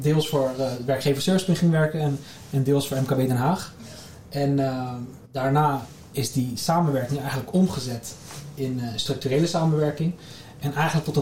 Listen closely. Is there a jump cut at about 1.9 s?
no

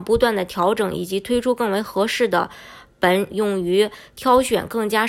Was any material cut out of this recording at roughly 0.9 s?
no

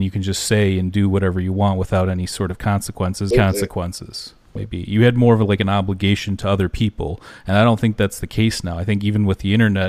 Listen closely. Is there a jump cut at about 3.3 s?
yes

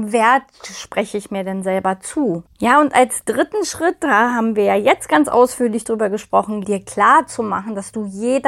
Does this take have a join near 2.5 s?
yes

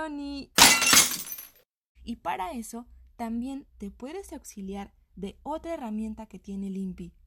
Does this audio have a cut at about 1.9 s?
yes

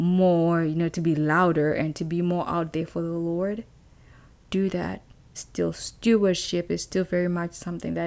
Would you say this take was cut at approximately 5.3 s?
yes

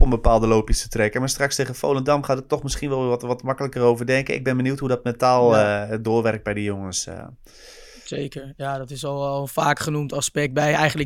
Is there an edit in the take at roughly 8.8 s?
no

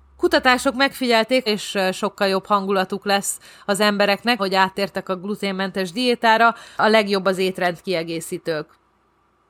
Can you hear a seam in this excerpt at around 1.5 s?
yes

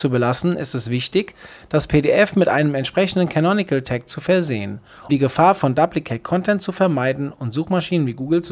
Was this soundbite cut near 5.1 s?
yes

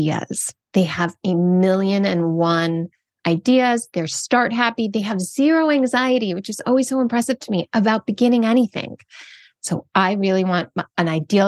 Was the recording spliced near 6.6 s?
no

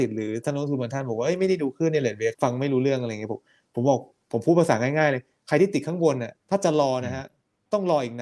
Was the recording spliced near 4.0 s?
no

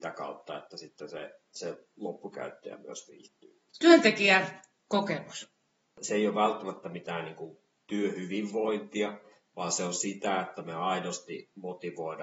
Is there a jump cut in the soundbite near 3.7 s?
yes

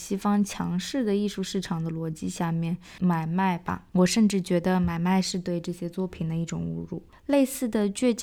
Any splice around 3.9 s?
no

